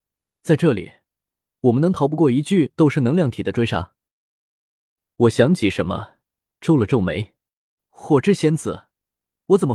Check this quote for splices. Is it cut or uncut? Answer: uncut